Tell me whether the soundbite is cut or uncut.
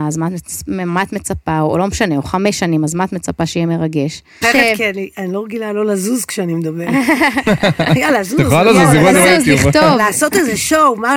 cut